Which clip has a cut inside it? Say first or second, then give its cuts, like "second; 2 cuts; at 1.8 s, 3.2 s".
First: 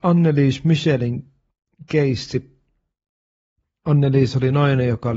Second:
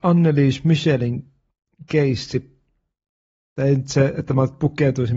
second; 1 cut; at 3.6 s